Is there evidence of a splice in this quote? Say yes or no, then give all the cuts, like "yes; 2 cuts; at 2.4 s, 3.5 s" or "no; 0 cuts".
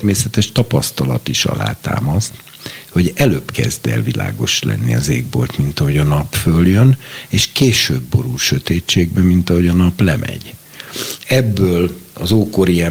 yes; 1 cut; at 11.2 s